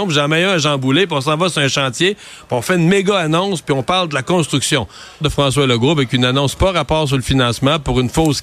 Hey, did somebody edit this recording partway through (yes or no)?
yes